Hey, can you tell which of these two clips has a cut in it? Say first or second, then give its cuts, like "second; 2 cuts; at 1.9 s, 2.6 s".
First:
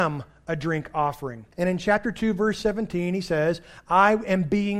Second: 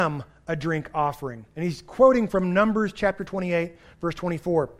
first; 1 cut; at 1.5 s